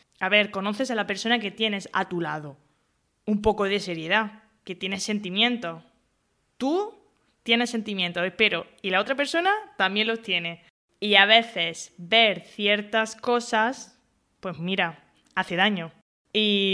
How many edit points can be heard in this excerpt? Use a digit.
0